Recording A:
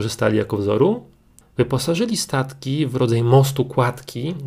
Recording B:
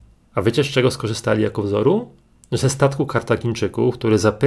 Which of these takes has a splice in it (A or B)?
A